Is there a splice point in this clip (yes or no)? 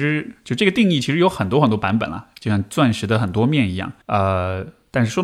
yes